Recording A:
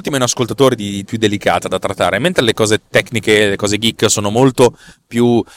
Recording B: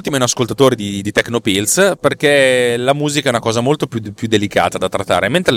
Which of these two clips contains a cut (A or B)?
A